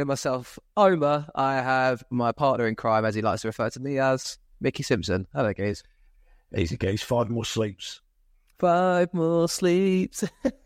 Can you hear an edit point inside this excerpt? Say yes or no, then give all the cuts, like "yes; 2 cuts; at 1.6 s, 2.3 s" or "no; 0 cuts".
no; 0 cuts